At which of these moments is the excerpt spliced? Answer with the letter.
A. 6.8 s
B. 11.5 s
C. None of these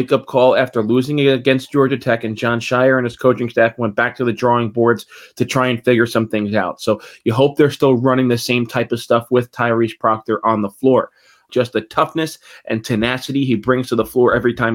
B